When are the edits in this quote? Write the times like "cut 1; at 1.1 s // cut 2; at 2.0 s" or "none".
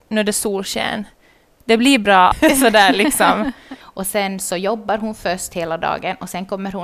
cut 1; at 2.3 s // cut 2; at 3.8 s